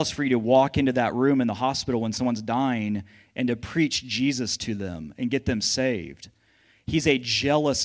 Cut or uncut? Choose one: uncut